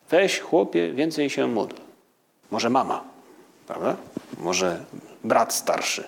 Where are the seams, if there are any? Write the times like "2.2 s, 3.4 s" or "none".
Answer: 2.4 s